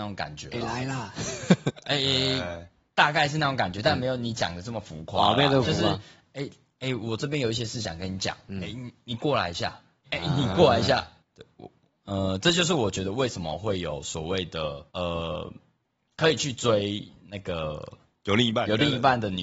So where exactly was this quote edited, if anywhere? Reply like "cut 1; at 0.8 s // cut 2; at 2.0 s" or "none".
cut 1; at 10.0 s // cut 2; at 11.2 s // cut 3; at 14.9 s

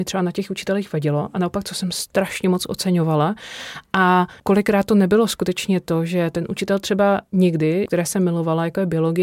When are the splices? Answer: cut 1; at 4.4 s // cut 2; at 7.9 s

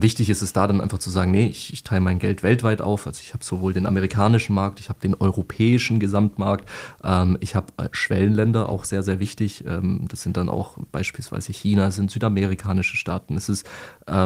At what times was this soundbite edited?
none

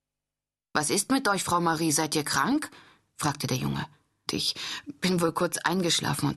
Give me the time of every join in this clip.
cut 1; at 4.3 s

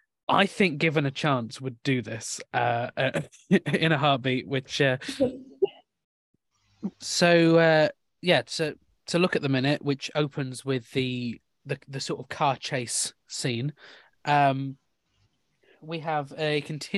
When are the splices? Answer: cut 1; at 6.9 s

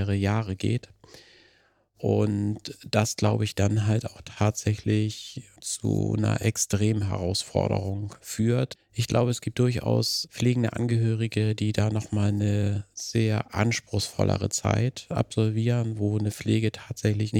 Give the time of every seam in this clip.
cut 1; at 8.8 s

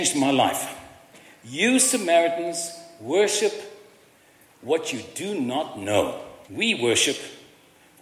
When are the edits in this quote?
cut 1; at 6.5 s

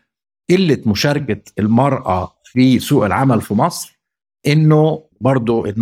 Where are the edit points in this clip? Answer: none

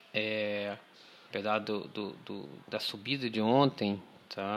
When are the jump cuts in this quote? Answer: cut 1; at 1.3 s

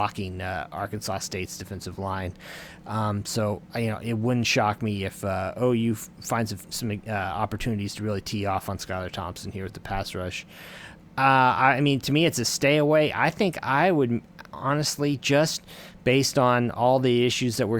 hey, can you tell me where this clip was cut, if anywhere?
none

